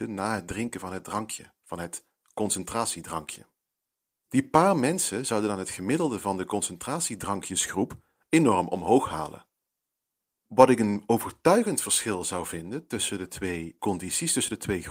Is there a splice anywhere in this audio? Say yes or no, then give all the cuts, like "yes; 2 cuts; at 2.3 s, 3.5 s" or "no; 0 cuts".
yes; 1 cut; at 13.8 s